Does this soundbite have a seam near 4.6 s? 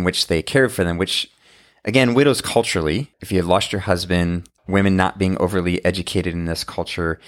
yes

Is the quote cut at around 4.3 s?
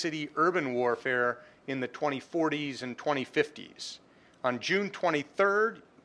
no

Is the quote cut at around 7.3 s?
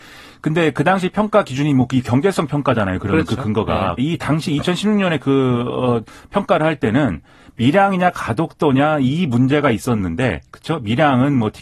no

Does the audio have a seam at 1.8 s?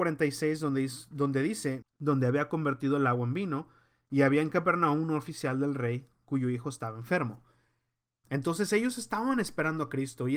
yes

